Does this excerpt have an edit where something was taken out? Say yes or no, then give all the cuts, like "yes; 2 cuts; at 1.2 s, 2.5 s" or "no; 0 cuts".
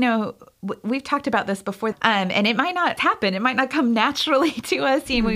yes; 2 cuts; at 1.9 s, 3.0 s